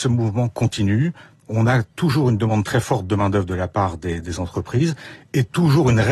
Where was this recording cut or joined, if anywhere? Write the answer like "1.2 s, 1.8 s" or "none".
none